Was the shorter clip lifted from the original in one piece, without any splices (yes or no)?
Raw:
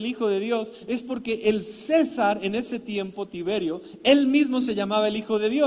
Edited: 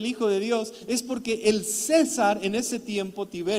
yes